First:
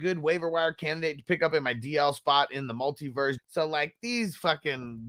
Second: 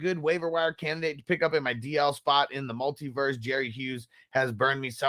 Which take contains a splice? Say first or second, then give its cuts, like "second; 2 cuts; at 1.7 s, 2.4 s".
first; 1 cut; at 3.4 s